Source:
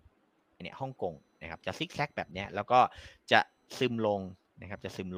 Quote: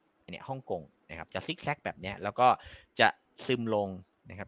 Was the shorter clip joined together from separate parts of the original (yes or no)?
no